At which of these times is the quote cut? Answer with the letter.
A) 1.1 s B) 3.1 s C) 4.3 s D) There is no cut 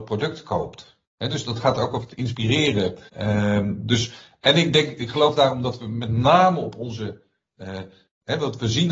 B